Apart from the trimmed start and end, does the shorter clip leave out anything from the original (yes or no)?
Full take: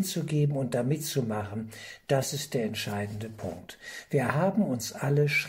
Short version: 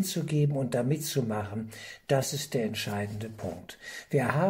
no